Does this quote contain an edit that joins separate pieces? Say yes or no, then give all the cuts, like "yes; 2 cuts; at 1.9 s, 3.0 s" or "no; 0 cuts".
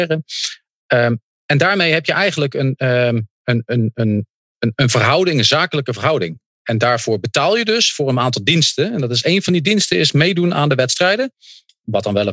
no; 0 cuts